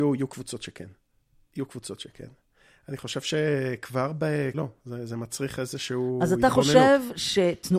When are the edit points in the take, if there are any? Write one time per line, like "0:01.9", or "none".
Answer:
0:04.5